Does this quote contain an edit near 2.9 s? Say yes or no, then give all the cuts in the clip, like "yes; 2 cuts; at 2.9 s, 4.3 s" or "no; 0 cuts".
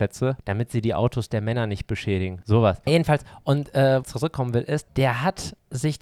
yes; 2 cuts; at 2.9 s, 4.0 s